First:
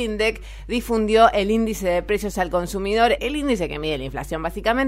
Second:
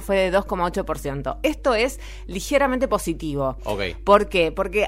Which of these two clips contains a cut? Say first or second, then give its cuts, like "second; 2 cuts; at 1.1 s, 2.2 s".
first; 1 cut; at 3.2 s